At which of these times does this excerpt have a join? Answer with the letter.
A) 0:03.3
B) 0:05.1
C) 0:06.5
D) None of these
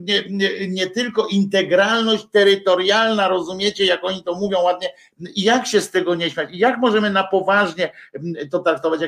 B